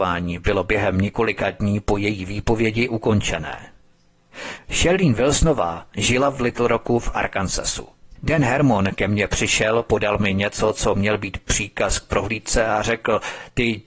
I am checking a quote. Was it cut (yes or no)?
yes